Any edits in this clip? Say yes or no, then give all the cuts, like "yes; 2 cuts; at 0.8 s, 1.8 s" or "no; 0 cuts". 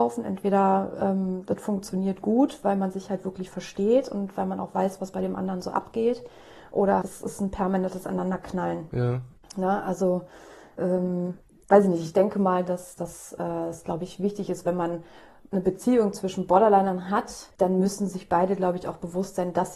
yes; 1 cut; at 7.0 s